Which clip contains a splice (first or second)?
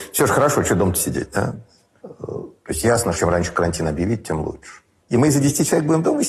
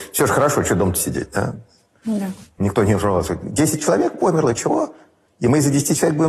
first